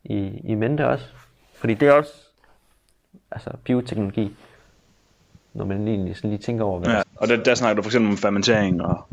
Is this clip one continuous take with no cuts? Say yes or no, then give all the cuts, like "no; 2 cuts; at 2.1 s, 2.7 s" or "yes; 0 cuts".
no; 1 cut; at 7.0 s